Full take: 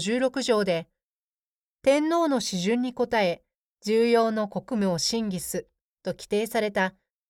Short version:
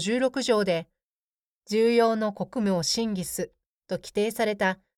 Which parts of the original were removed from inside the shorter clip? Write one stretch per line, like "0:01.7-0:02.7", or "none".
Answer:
0:01.6-0:03.7